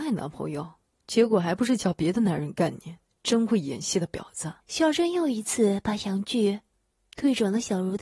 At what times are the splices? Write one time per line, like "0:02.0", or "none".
0:04.6

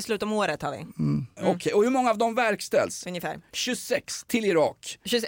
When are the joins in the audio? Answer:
none

